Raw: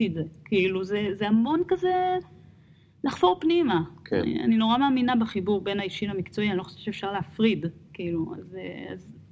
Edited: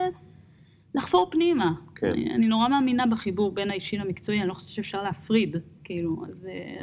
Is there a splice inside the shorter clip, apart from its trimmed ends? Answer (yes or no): no